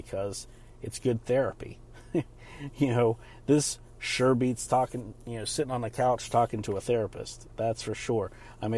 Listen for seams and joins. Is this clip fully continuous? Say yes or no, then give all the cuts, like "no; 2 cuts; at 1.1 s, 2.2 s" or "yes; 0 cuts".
yes; 0 cuts